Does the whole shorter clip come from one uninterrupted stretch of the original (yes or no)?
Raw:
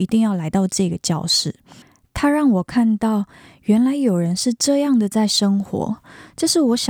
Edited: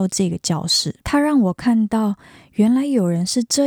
no